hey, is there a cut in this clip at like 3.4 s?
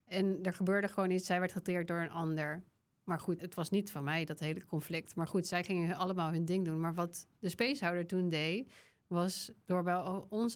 yes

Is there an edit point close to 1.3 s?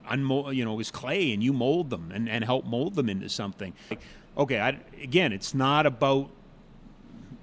no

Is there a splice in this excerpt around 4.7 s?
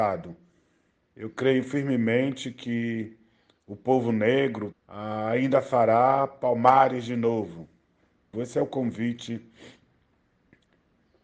yes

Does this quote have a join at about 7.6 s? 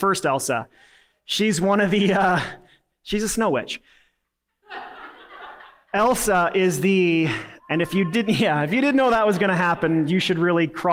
yes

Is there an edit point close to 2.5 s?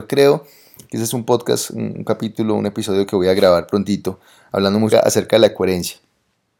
no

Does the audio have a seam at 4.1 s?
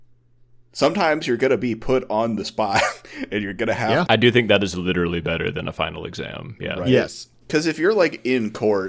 yes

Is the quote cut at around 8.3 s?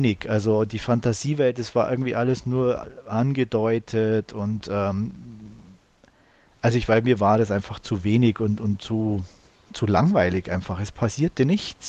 no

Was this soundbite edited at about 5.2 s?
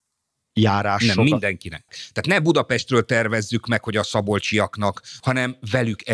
yes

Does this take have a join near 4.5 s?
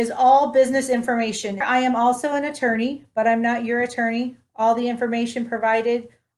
no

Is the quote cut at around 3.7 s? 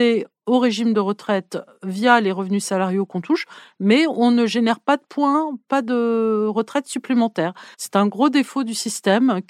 no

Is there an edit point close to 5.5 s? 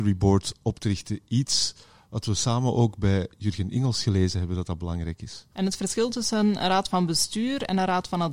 yes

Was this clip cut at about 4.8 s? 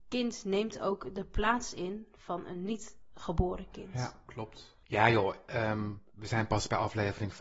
yes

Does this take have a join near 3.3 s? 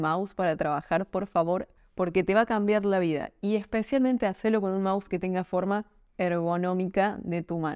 no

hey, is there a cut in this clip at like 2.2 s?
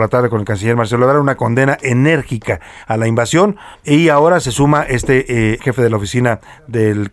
no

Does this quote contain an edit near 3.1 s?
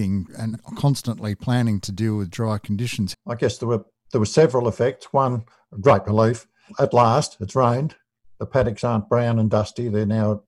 yes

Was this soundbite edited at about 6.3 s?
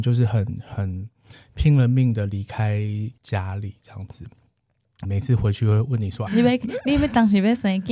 yes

